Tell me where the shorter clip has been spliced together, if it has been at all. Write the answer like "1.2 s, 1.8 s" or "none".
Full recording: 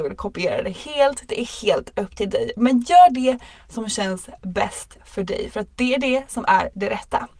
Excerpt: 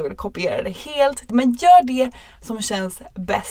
1.3 s